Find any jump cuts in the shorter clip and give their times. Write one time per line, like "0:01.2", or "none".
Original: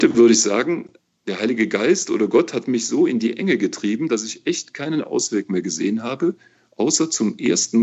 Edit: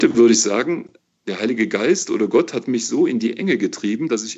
none